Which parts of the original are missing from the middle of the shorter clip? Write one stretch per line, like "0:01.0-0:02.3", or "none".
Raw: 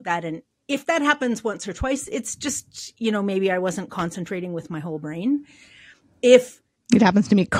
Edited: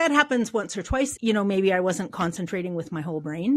0:02.1-0:02.9